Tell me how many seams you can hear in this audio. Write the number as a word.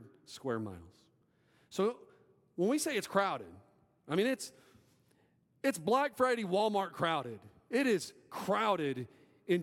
zero